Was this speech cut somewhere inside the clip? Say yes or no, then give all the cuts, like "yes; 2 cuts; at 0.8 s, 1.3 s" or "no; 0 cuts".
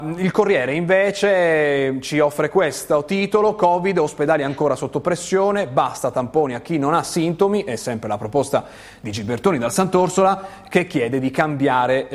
no; 0 cuts